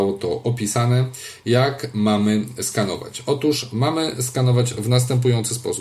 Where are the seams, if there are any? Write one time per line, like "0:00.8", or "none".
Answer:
none